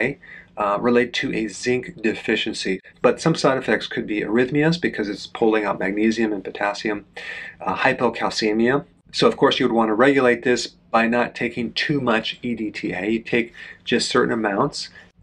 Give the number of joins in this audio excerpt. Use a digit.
1